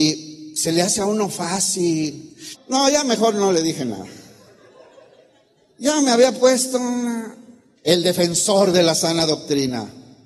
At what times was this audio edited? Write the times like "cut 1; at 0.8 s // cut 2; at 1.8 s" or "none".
cut 1; at 2.5 s // cut 2; at 7.8 s